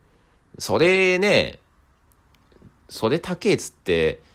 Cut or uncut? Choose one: uncut